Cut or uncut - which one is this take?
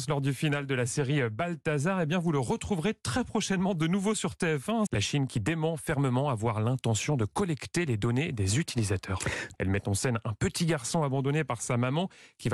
cut